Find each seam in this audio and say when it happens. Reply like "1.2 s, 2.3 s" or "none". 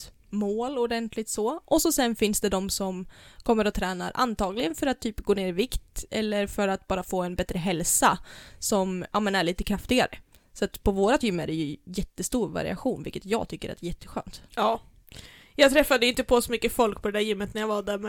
14.5 s